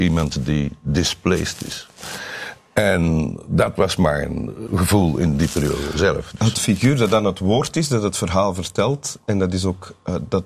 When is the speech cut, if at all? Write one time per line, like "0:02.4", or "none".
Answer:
0:04.7